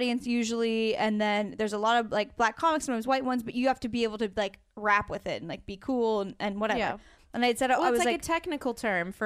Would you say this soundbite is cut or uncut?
uncut